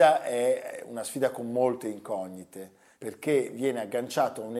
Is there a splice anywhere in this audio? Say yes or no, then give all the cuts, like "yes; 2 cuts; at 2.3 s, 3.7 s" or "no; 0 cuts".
no; 0 cuts